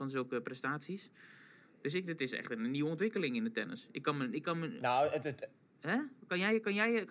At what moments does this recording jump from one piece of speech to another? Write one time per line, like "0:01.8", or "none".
none